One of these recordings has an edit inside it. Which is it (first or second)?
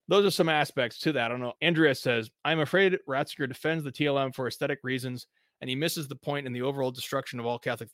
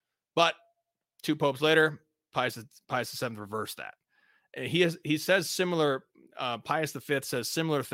first